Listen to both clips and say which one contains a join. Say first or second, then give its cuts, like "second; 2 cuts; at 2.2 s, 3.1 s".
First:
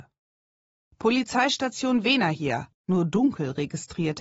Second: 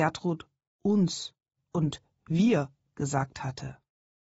first; 2 cuts; at 0.9 s, 2.7 s